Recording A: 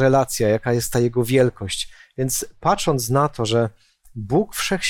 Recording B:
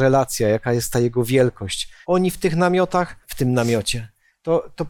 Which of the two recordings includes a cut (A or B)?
B